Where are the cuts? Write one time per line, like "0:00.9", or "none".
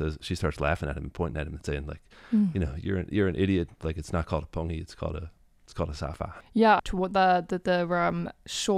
0:06.8